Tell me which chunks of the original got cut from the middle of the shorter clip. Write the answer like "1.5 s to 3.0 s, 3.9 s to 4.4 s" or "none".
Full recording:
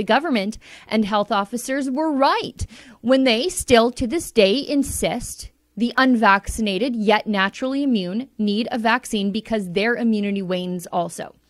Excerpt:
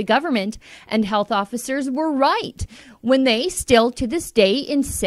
none